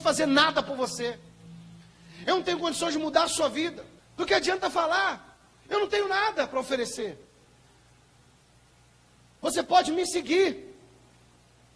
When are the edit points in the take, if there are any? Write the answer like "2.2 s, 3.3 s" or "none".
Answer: 4.0 s